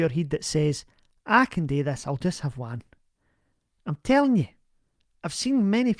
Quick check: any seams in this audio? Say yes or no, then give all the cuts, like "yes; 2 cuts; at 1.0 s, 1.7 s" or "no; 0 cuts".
no; 0 cuts